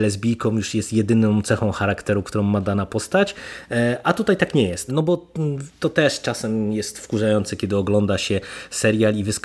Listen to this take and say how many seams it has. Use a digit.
1